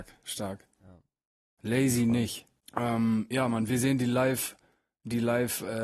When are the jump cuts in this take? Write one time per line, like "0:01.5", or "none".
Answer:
0:02.6